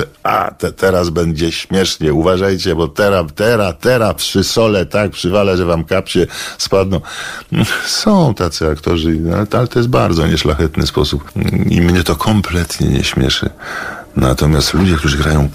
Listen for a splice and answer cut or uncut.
uncut